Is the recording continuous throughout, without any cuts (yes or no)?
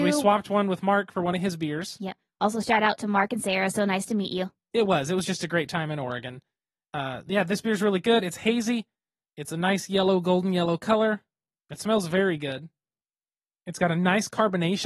no